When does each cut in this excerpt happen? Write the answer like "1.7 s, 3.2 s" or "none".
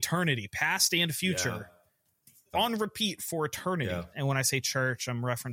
2.5 s, 4.1 s